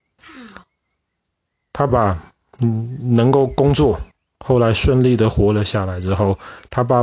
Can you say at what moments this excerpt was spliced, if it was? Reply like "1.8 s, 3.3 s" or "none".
1.9 s